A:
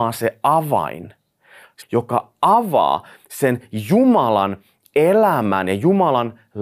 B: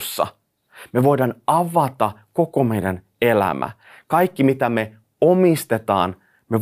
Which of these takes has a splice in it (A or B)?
A